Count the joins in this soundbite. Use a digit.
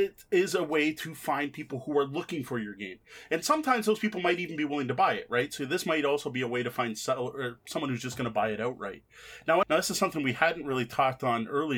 1